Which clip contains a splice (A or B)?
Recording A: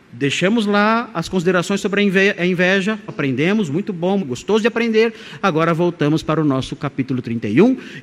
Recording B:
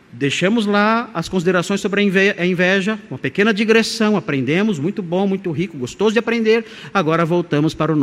A